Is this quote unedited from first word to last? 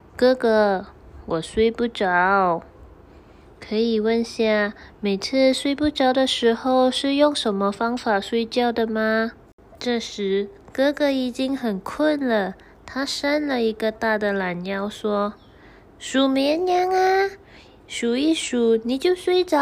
no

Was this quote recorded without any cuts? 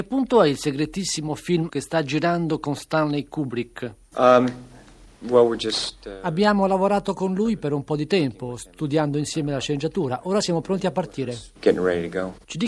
yes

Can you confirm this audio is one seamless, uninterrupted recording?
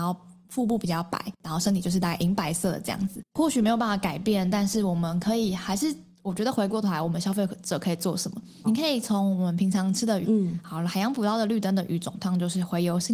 no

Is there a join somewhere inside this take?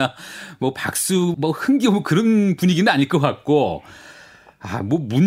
yes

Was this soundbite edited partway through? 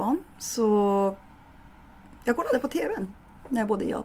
no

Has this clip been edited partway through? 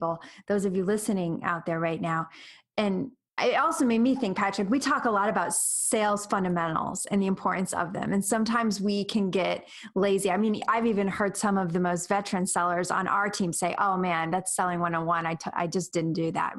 no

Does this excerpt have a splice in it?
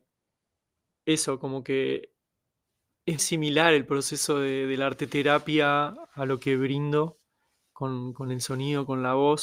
yes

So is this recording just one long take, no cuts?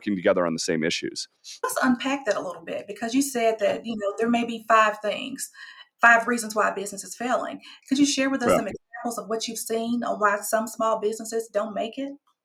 yes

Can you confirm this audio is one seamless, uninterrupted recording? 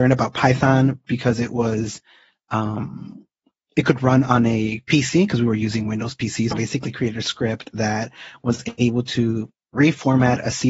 no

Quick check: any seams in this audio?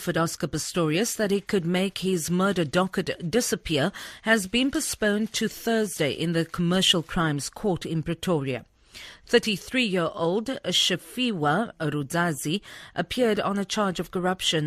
no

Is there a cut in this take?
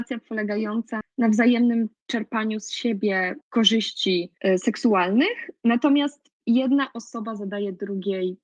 yes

